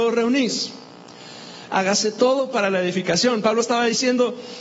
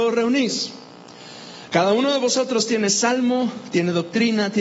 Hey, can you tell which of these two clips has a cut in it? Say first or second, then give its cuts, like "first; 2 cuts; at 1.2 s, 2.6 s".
first; 1 cut; at 1.7 s